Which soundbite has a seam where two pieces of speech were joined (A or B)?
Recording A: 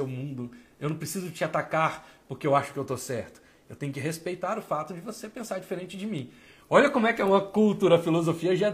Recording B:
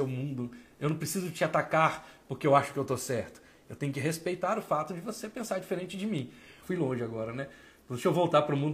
B